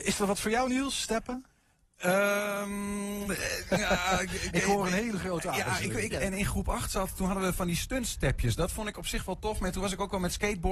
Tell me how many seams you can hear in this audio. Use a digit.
2